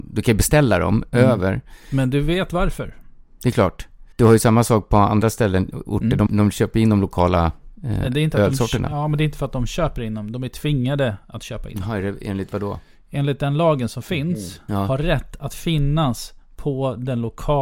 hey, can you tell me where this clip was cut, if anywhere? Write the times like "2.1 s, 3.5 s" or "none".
4.1 s, 6.3 s, 14.7 s